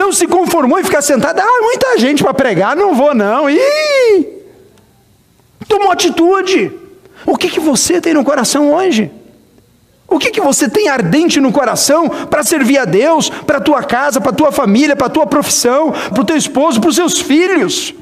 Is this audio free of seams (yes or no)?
no